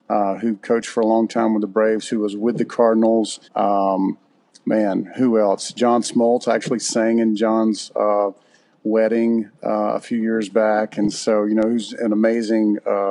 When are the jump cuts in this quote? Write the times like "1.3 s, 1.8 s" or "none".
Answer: 3.4 s